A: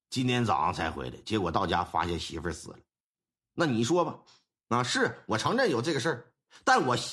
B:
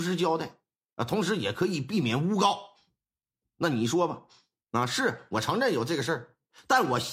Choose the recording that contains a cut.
B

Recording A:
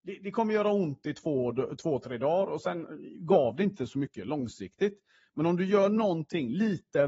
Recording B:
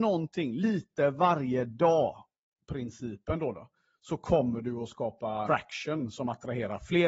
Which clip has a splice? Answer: B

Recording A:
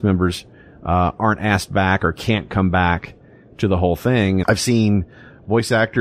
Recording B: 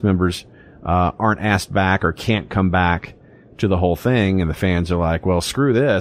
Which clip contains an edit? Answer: A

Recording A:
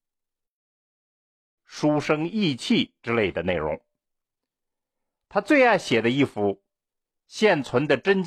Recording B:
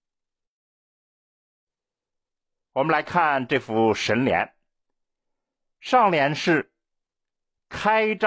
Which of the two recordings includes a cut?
A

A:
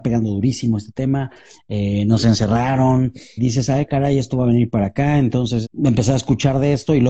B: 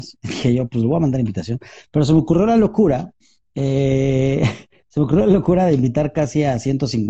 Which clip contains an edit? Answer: A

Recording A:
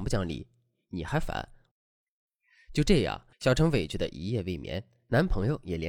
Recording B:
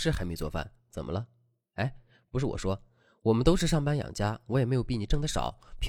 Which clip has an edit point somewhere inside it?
A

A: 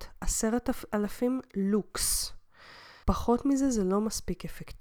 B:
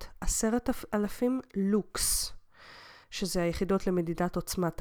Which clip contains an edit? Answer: A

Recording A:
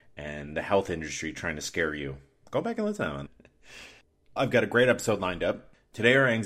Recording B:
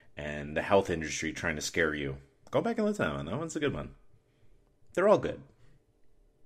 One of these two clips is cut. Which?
A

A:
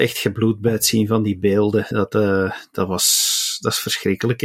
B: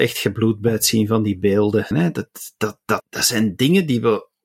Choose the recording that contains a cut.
B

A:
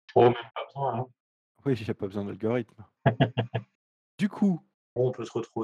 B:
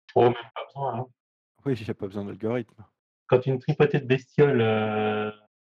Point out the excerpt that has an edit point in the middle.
A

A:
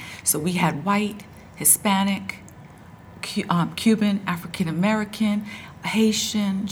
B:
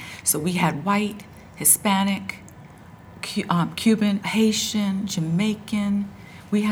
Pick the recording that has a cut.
B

